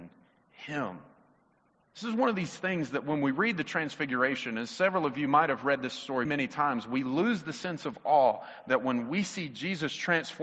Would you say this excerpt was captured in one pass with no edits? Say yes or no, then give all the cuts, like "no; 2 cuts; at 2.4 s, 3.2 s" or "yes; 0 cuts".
no; 2 cuts; at 1.9 s, 6.2 s